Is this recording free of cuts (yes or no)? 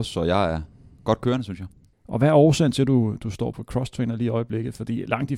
no